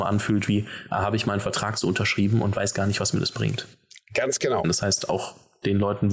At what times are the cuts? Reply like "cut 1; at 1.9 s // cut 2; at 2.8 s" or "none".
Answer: cut 1; at 4.6 s